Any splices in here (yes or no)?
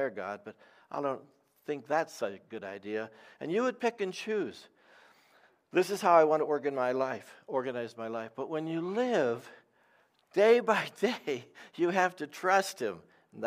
no